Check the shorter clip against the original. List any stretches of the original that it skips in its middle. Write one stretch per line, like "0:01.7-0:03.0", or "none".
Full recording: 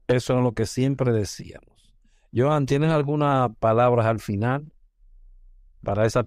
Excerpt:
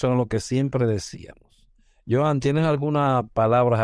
none